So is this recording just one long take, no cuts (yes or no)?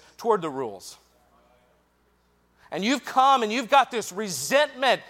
yes